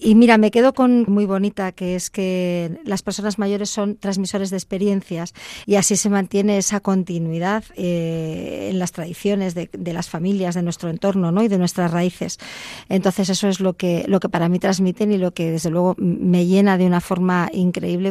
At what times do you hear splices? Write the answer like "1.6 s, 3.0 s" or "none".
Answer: 1.1 s, 5.6 s